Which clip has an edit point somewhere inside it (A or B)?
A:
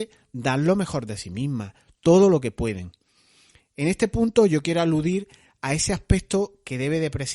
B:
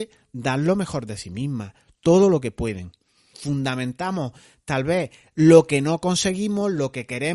B